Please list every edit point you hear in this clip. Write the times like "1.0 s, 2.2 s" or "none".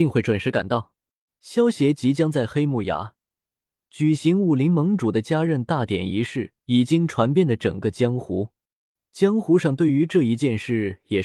1.3 s, 6.6 s